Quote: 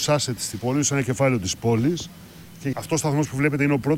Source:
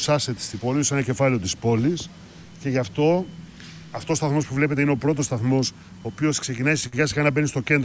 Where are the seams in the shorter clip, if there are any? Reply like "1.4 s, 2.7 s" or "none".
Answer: 2.7 s